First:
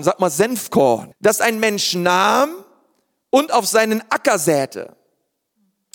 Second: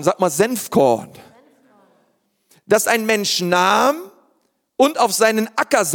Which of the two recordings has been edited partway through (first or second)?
first